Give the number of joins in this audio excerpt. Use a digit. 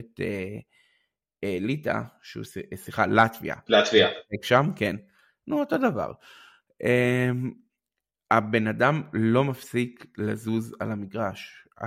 0